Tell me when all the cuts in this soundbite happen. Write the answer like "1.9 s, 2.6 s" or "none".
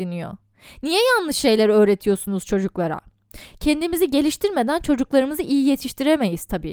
none